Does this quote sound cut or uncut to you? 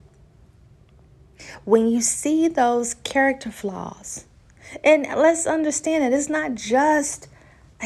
uncut